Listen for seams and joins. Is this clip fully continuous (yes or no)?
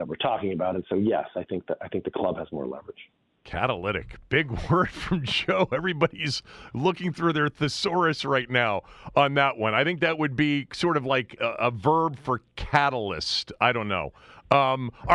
no